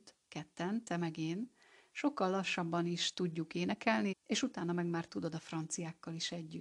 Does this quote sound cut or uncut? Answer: cut